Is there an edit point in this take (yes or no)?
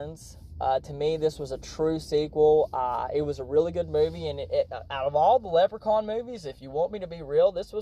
no